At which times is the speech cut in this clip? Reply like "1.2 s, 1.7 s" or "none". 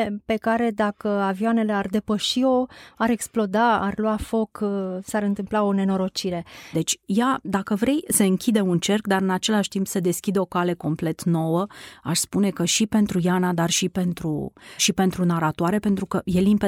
6.7 s, 14.8 s